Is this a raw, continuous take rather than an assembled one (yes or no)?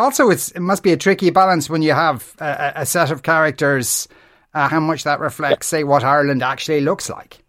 no